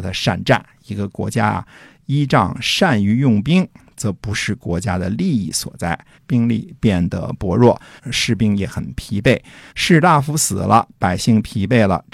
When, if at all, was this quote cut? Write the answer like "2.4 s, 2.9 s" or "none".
6.1 s, 8.0 s, 9.7 s